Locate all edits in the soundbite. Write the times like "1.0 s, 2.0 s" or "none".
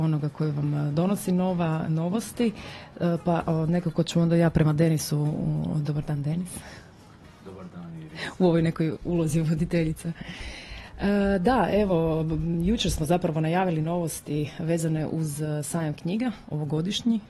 none